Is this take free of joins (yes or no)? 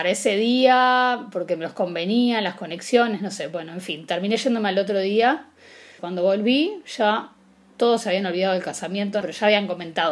no